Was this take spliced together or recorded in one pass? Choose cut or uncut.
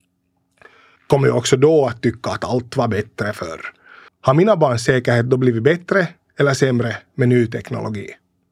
cut